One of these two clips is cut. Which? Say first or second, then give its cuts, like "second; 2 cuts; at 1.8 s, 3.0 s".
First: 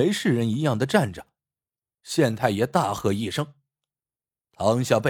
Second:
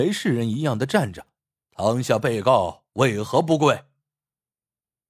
second; 1 cut; at 1.6 s